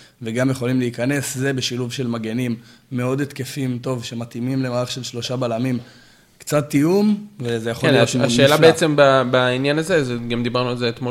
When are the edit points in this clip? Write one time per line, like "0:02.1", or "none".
none